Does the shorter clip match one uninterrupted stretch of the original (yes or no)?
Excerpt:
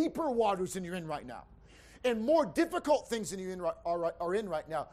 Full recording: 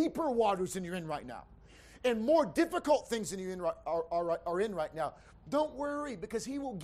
no